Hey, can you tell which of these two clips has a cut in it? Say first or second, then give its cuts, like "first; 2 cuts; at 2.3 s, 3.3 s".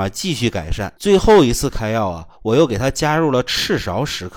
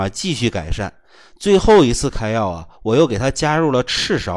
first; 1 cut; at 1.0 s